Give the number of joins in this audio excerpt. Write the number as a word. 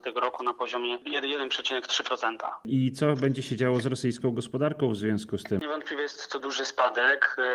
one